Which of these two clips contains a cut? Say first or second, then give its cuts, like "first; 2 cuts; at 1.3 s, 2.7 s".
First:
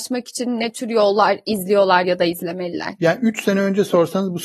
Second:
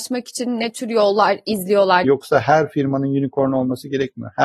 second; 1 cut; at 2.0 s